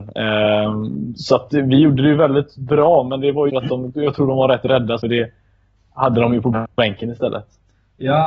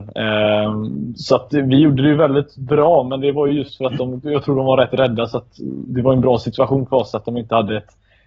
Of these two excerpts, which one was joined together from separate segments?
first; 2 cuts; at 3.5 s, 5.0 s

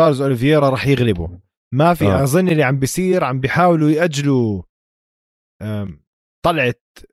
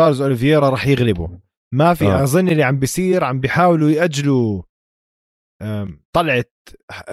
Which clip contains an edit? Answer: second; 1 cut; at 6.0 s

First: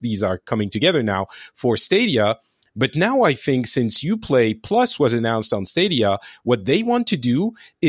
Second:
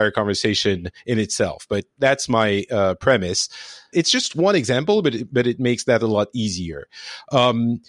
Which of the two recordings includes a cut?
second; 1 cut; at 3.9 s

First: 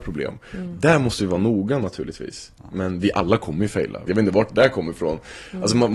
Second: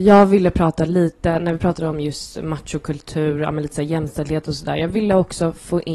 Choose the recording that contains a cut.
first; 1 cut; at 4.1 s

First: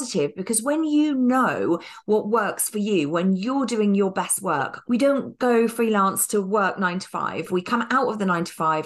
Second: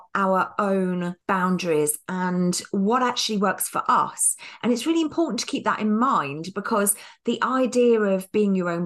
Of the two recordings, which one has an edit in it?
first; 1 cut; at 4.8 s

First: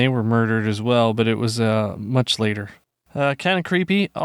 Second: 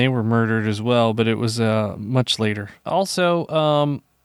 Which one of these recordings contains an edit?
second; 1 cut; at 2.8 s

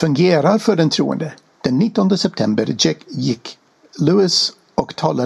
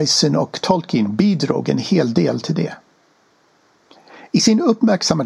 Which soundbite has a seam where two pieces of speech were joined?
first; 1 cut; at 1.5 s

